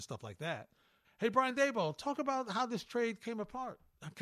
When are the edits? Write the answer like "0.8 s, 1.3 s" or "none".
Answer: 1.0 s